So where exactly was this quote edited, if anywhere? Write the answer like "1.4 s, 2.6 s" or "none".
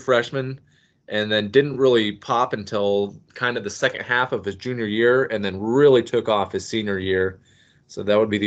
none